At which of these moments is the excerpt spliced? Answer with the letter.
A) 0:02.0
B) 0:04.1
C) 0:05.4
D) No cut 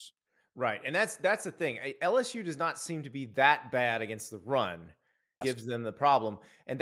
C